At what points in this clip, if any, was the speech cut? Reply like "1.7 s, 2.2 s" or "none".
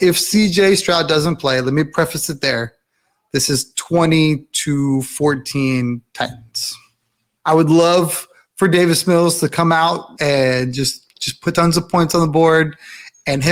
7.4 s, 10.2 s